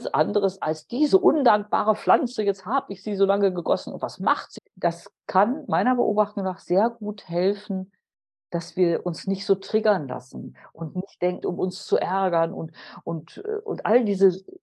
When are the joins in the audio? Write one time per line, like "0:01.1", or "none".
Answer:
0:04.6
0:11.4

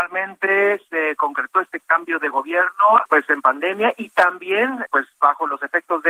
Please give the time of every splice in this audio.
0:03.1
0:04.9

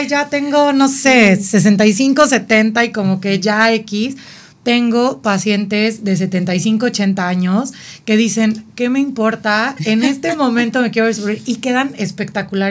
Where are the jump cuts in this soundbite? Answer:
none

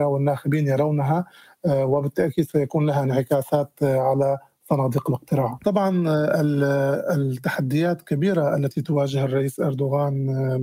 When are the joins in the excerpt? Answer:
0:05.6

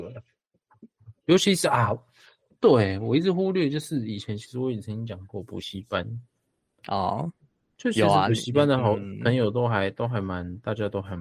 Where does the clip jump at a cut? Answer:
none

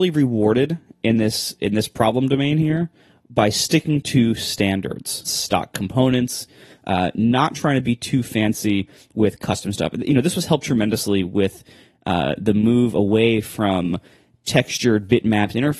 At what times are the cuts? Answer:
0:05.2

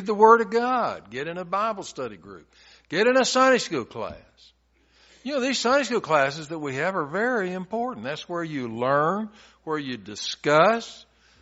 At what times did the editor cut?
none

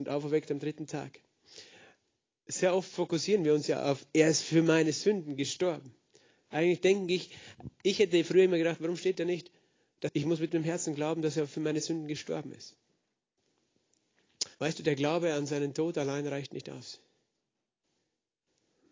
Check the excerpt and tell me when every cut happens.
0:10.1
0:14.5

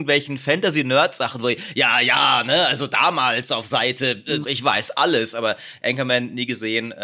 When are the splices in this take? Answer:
0:04.4

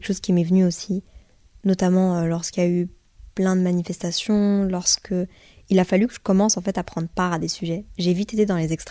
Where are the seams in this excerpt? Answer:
none

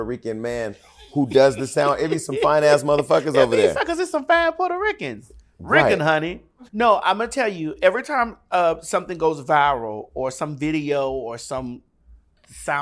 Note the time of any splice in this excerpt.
0:06.7

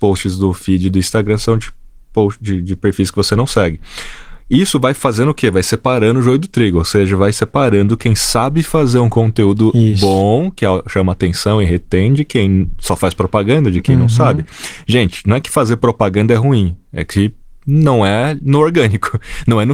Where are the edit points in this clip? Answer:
none

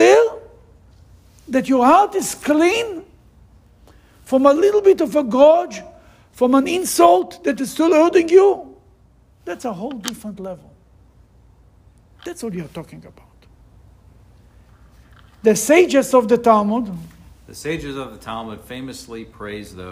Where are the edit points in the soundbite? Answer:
none

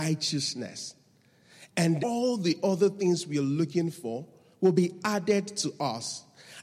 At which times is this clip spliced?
0:02.0

